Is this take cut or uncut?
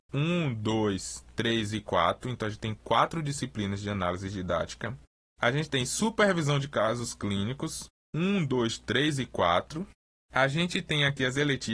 uncut